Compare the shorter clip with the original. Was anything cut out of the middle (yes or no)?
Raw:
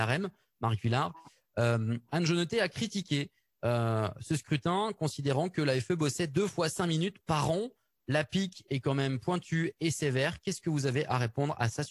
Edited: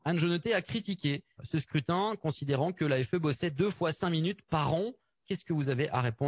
yes